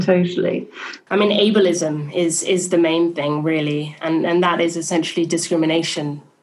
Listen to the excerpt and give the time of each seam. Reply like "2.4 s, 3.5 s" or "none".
1.1 s